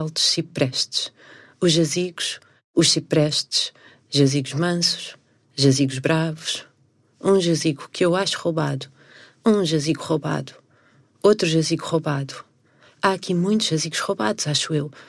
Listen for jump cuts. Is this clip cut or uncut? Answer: uncut